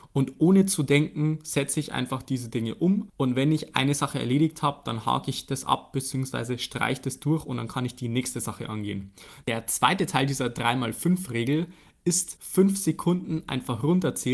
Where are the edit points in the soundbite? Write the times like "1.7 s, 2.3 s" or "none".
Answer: 9.4 s, 12.4 s